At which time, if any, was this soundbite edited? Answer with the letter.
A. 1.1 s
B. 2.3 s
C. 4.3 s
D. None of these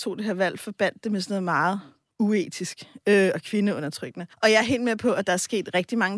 C